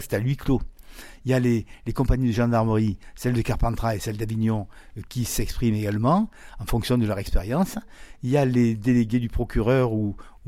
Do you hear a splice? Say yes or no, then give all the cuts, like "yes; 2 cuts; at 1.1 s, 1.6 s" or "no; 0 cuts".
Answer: no; 0 cuts